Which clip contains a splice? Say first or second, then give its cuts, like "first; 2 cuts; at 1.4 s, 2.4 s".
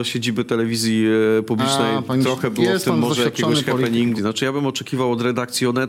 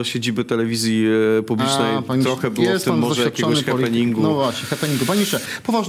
first; 1 cut; at 4.2 s